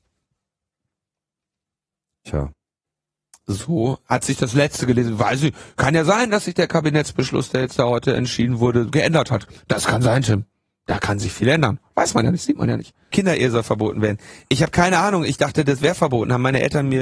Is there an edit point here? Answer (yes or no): yes